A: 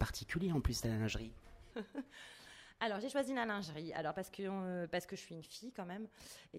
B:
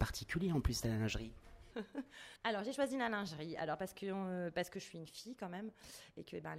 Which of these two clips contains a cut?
B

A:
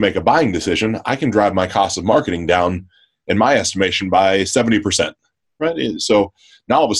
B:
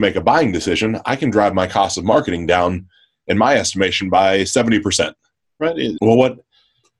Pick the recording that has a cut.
B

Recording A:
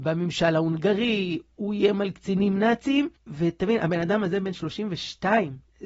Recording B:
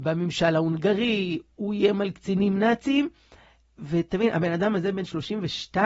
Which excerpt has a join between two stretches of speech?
A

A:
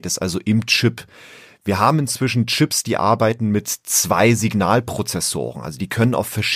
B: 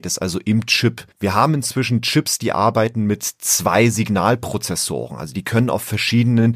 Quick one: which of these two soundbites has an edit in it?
B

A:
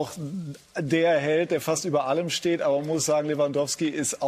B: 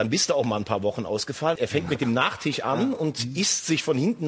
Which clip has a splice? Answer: B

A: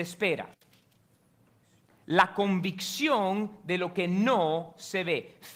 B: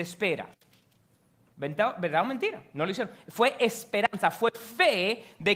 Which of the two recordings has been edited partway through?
B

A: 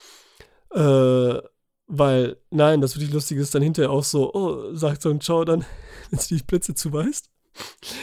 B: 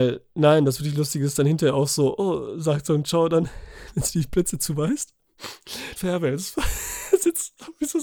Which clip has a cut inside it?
B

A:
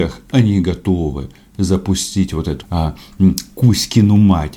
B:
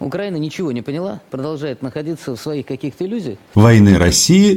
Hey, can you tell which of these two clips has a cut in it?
A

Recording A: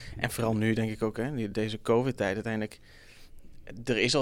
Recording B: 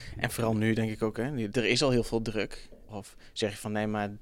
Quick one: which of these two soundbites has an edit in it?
B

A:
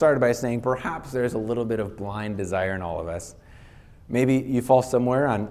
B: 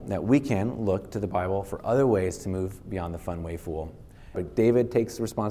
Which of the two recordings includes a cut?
B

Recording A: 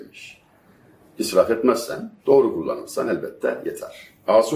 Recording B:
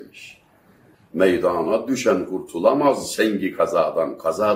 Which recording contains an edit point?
B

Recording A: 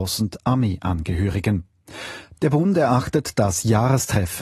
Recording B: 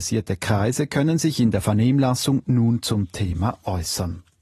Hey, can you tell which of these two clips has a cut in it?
A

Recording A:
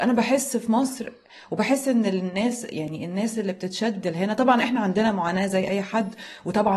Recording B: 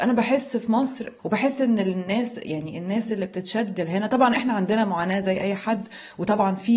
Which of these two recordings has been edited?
B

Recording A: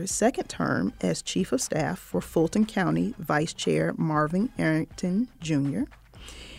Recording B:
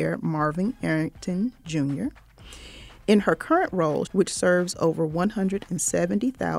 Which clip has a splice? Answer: B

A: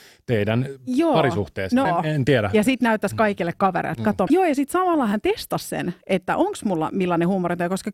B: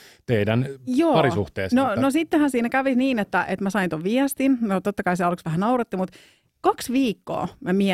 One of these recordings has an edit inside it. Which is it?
A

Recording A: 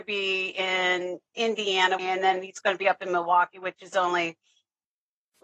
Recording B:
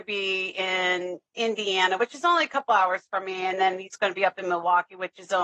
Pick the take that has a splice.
A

